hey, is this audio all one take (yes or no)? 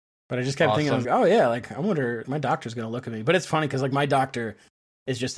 no